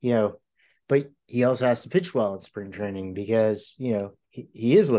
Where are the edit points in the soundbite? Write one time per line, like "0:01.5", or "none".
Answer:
none